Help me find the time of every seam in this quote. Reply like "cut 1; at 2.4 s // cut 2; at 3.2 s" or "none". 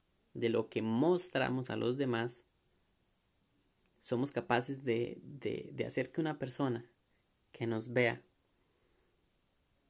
none